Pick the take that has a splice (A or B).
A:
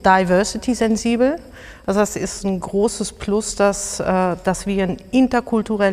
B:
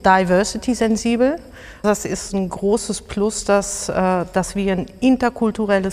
B